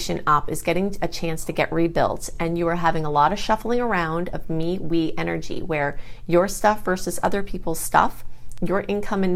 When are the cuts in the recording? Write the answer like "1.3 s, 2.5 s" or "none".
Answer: none